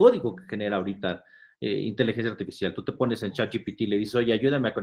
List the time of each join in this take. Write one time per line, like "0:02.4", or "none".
none